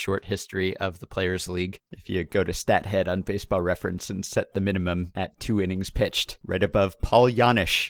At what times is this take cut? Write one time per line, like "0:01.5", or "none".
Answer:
0:01.9
0:06.4